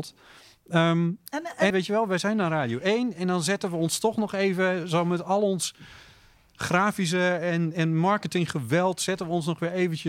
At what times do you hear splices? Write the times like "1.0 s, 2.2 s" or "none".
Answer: 1.7 s